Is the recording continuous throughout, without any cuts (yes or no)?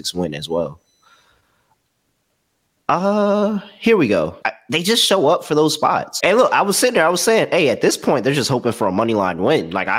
no